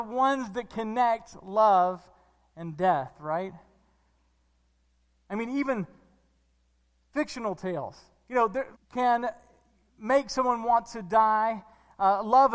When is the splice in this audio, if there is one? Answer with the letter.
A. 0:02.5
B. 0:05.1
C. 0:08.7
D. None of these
C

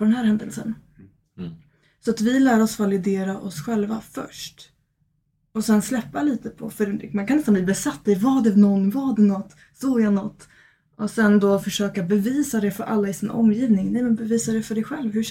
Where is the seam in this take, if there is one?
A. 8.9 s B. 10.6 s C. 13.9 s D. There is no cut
D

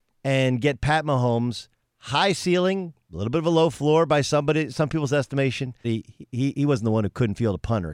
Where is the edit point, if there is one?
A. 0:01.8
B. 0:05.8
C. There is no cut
B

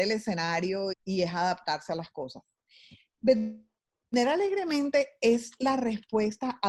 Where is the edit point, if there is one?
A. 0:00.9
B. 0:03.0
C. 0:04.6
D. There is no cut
A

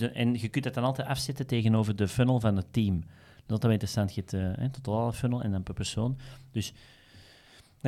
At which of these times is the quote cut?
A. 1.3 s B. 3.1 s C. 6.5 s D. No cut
D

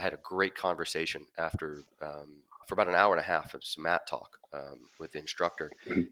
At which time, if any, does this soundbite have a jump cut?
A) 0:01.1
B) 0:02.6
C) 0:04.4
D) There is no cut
B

